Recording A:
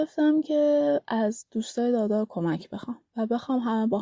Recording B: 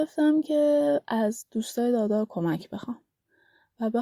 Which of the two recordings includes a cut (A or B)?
A